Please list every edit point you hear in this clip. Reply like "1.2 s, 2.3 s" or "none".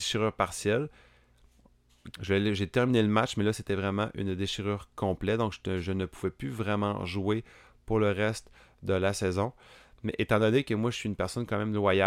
2.1 s